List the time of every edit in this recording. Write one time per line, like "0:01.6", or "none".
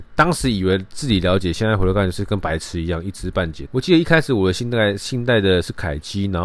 0:03.7